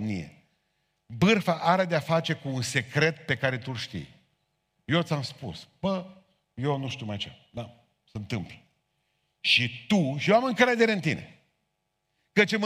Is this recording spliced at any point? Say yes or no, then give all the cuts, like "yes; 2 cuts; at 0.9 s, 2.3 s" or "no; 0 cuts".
no; 0 cuts